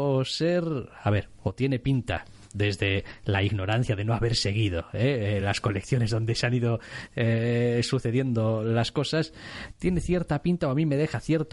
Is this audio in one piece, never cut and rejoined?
yes; 0 cuts

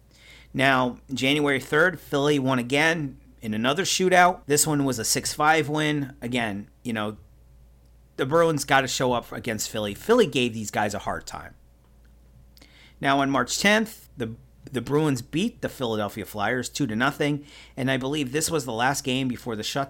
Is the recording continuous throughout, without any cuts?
no; 2 cuts; at 4.4 s, 14.1 s

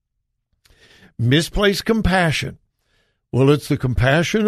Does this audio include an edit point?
no; 0 cuts

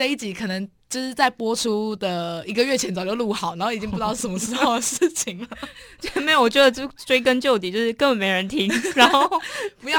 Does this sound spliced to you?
no; 0 cuts

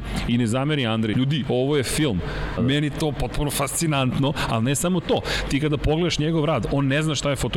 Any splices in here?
yes; 2 cuts; at 1.1 s, 2.6 s

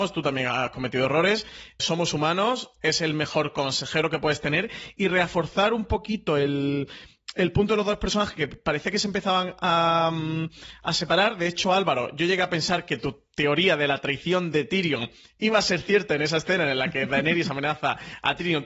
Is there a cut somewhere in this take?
yes; 1 cut; at 1.8 s

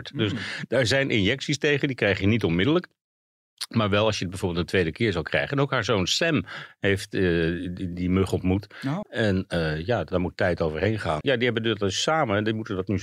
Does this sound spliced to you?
yes; 2 cuts; at 9.0 s, 11.2 s

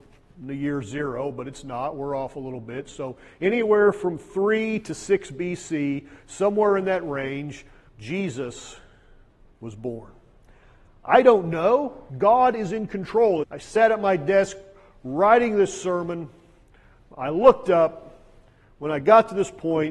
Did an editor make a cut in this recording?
yes; 3 cuts; at 7.9 s, 12.1 s, 13.4 s

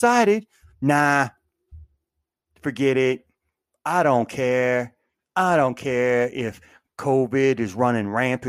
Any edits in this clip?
no; 0 cuts

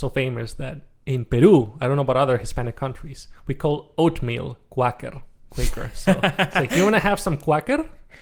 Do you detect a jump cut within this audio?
no; 0 cuts

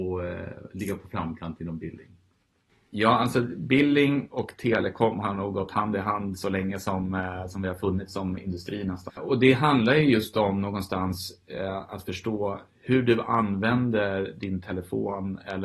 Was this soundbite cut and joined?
yes; 1 cut; at 9.1 s

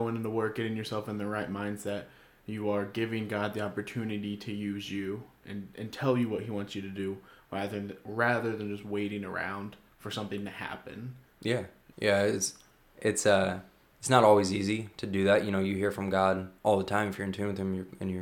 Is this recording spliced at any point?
yes; 2 cuts; at 11.9 s, 16.6 s

